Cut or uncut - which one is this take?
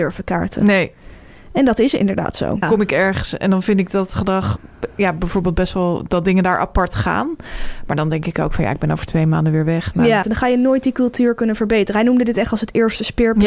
cut